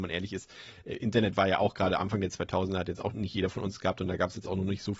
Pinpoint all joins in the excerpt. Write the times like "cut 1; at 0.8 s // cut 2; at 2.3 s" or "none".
cut 1; at 3.1 s